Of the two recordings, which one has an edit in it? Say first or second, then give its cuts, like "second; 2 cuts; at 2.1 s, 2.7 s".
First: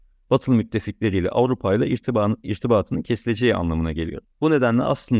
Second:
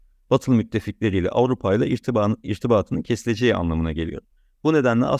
first; 1 cut; at 4.3 s